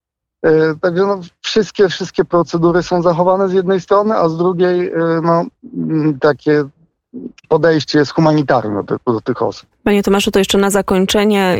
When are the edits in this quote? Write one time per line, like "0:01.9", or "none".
0:07.4
0:09.7